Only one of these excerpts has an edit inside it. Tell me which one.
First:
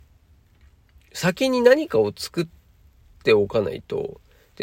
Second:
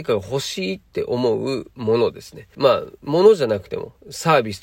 second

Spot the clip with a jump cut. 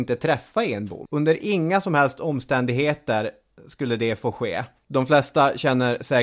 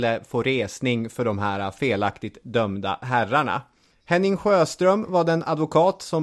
first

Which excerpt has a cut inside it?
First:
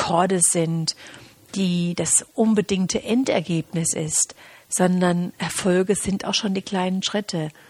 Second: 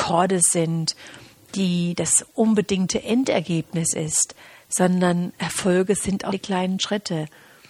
second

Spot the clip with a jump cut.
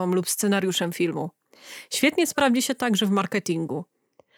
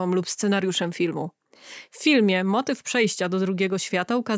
second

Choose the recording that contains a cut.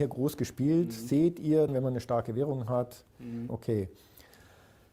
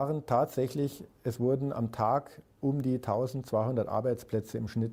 first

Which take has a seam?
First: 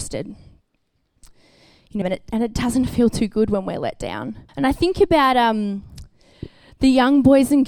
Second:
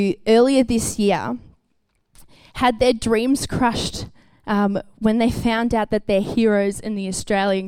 first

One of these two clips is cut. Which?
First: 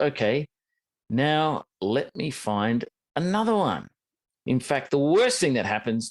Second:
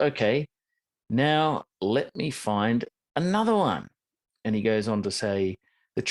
first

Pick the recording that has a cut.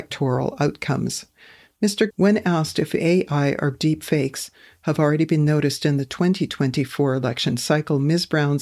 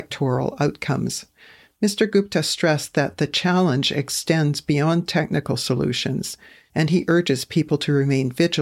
first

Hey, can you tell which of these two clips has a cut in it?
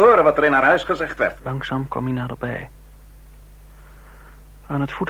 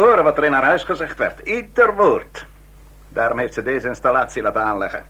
first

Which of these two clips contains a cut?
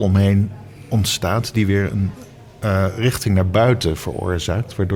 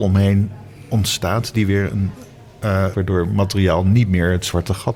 second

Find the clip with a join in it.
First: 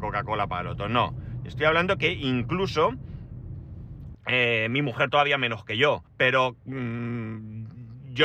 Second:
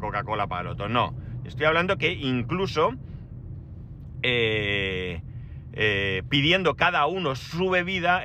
first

